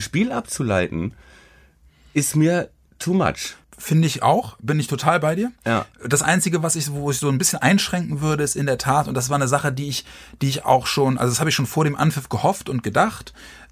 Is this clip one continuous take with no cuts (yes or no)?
no